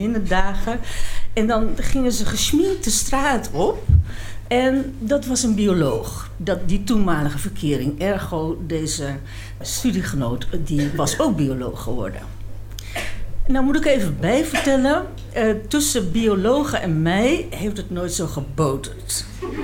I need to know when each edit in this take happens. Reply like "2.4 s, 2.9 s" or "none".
4.5 s, 9.6 s